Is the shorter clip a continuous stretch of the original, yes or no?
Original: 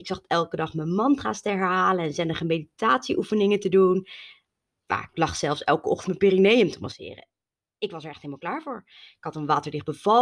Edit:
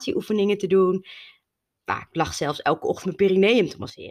yes